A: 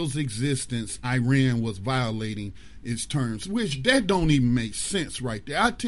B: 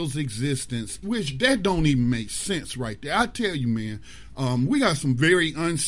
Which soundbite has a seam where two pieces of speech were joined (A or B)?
B